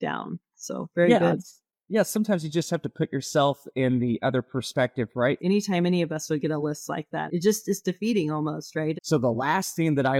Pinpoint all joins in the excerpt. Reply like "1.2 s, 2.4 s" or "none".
5.4 s, 7.3 s, 9.0 s